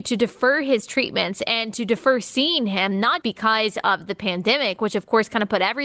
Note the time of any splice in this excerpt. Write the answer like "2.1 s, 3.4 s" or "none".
3.2 s

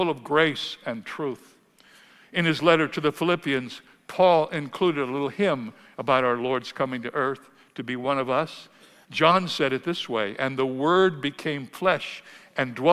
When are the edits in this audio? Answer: 9.0 s

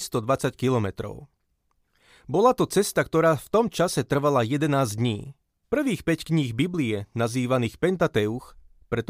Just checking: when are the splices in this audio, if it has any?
5.6 s

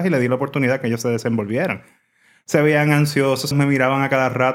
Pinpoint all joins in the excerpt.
3.5 s

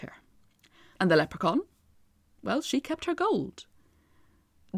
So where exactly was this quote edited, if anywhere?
0.9 s

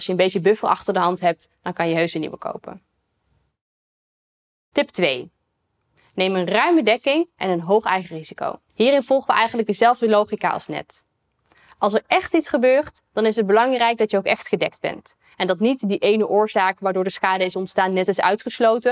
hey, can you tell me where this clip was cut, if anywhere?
8.7 s

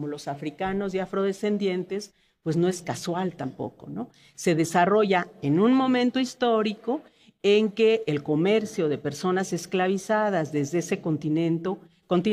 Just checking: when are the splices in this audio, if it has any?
none

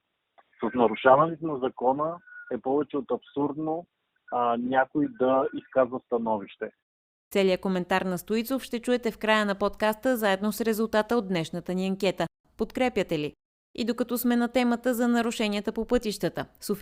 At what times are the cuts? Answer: 12.4 s

